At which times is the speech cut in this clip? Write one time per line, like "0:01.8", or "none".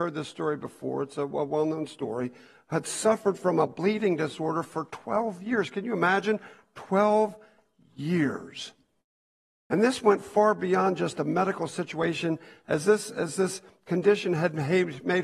none